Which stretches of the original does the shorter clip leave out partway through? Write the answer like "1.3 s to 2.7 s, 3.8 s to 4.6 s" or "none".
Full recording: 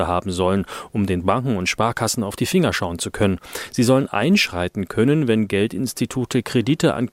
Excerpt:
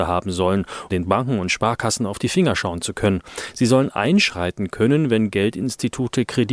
0.9 s to 1.1 s